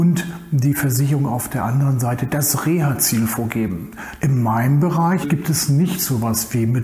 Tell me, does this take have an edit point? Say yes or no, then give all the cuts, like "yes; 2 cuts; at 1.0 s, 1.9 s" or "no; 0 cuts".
yes; 2 cuts; at 4.2 s, 5.2 s